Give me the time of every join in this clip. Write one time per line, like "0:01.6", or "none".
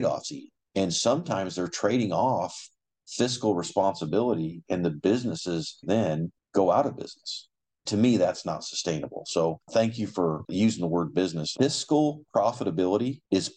0:05.8
0:11.6